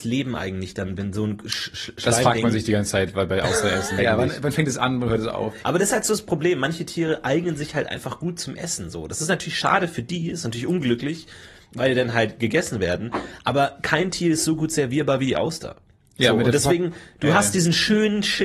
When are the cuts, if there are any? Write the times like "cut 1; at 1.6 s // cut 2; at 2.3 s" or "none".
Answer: cut 1; at 4.0 s // cut 2; at 5.6 s

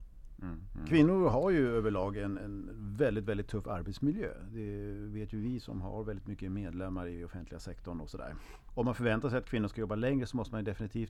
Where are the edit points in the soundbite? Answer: none

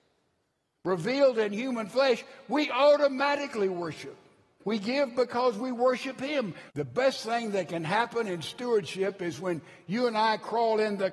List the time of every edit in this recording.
cut 1; at 4.6 s // cut 2; at 6.7 s

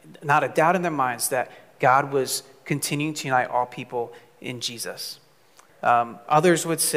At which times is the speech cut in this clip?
cut 1; at 5.7 s

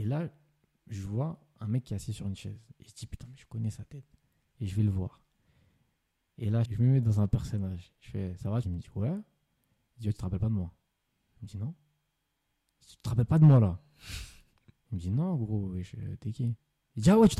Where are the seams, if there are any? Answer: cut 1; at 6.7 s // cut 2; at 8.6 s

